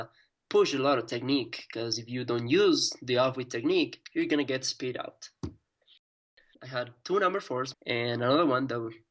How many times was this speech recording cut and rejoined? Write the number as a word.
two